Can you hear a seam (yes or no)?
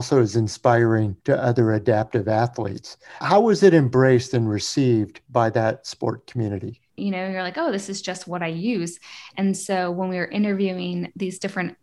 yes